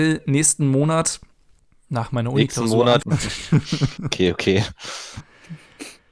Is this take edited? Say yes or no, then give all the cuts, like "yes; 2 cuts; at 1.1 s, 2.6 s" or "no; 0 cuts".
yes; 1 cut; at 3.0 s